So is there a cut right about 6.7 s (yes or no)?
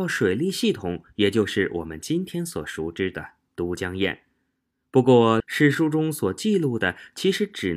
no